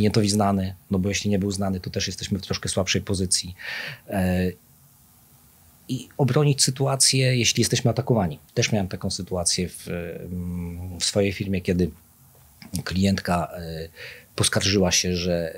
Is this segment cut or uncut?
cut